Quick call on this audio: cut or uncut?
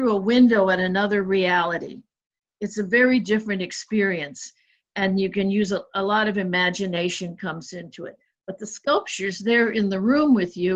uncut